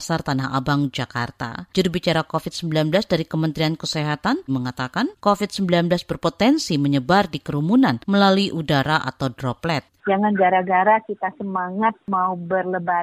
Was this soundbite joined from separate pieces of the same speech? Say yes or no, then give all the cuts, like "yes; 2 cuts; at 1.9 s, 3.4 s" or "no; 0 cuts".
yes; 2 cuts; at 4.5 s, 10.0 s